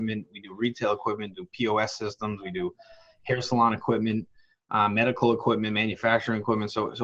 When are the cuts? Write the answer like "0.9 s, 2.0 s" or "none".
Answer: none

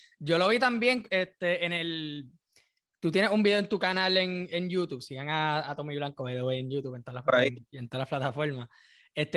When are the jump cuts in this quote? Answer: none

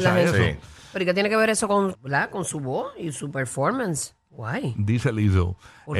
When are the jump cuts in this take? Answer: 1.9 s, 4.3 s

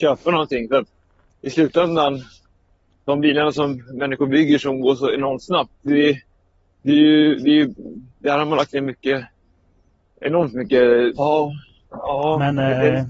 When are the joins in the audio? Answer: 8.1 s, 11.1 s

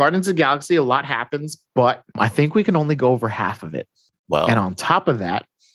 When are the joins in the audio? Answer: 2.1 s, 4.1 s

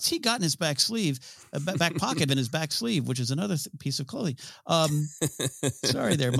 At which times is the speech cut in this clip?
2.3 s

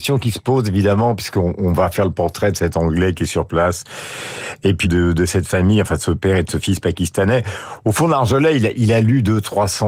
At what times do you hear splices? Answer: 4.8 s

